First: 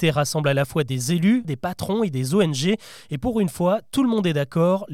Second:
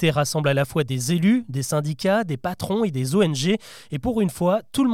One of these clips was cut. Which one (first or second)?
first